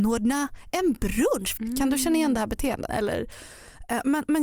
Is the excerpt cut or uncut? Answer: cut